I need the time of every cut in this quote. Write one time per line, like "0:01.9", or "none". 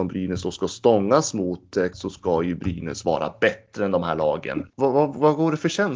0:01.9
0:04.7